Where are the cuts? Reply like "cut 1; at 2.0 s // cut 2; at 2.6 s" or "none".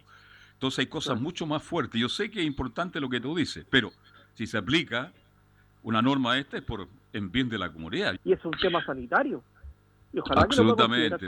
cut 1; at 8.2 s